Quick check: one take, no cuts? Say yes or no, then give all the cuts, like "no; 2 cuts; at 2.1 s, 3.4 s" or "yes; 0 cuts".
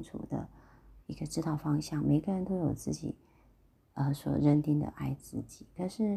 yes; 0 cuts